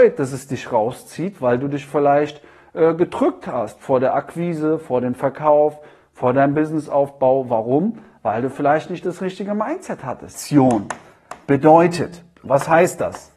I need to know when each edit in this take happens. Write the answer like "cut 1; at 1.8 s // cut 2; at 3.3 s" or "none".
cut 1; at 10.3 s // cut 2; at 12.4 s